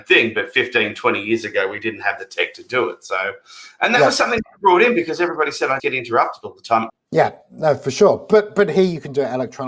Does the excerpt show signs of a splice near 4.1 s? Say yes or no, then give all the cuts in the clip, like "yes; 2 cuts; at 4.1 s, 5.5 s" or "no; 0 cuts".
no; 2 cuts; at 5.8 s, 6.9 s